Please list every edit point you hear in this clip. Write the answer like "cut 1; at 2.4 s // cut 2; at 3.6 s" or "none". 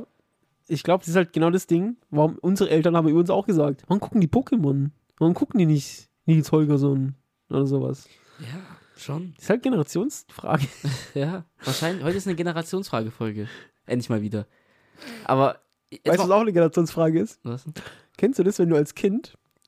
cut 1; at 6.2 s